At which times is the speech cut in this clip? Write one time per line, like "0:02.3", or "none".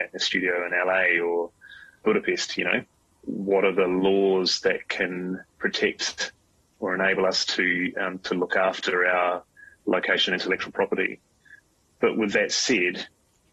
none